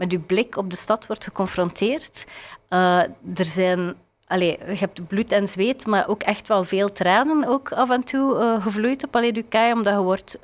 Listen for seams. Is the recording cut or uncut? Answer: uncut